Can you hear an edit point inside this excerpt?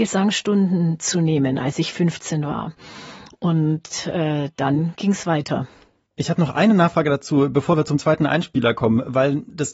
no; 0 cuts

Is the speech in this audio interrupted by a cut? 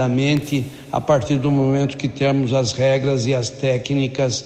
no; 0 cuts

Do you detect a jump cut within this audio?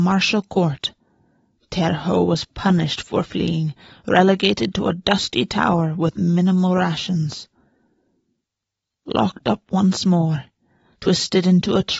yes; 1 cut; at 1.6 s

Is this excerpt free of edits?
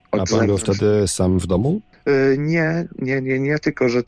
yes; 0 cuts

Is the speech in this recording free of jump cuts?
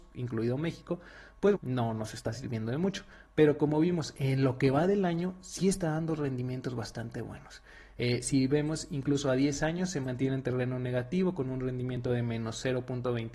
no; 1 cut; at 1.5 s

